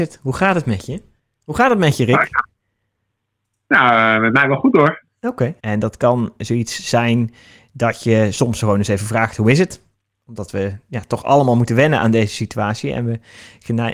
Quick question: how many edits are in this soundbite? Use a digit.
1